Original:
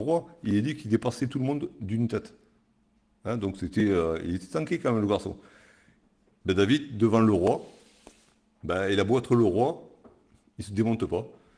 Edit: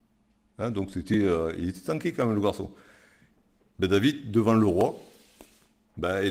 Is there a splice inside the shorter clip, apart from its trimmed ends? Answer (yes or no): no